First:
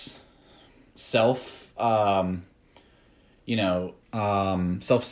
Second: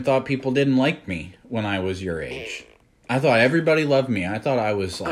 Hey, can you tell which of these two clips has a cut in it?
first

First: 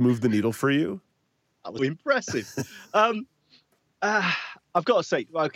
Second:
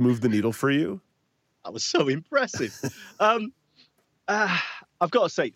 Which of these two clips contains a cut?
first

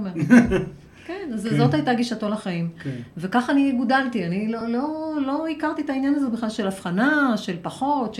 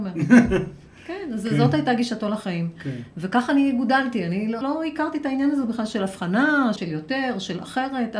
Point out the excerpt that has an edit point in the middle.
second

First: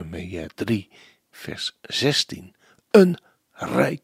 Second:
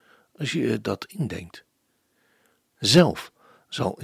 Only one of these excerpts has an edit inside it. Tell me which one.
second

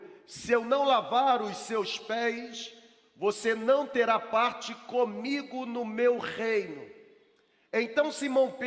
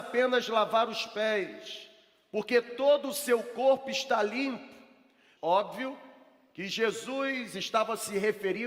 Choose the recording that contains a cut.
second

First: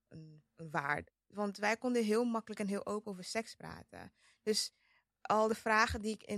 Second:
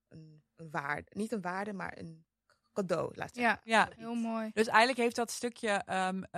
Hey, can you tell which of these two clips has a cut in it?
first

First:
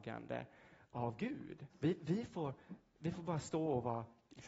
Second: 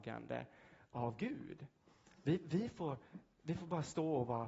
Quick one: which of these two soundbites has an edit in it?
first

